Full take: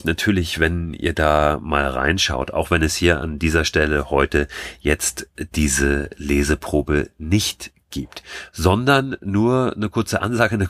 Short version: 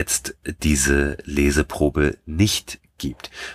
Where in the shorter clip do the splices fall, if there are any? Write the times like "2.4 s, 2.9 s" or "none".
none